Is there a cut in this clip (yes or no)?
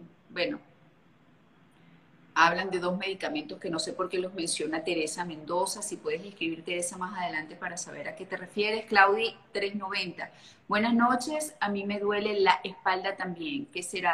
no